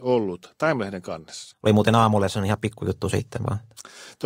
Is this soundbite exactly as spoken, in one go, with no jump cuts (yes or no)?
no